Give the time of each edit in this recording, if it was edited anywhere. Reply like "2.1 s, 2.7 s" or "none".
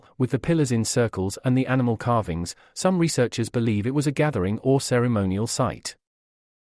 none